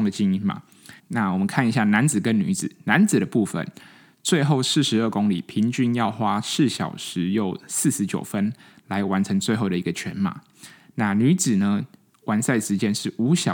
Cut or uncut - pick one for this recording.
cut